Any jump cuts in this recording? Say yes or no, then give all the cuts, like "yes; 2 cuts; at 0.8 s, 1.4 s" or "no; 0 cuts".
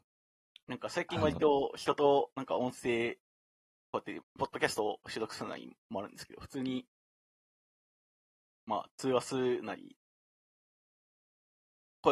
yes; 2 cuts; at 4.2 s, 8.5 s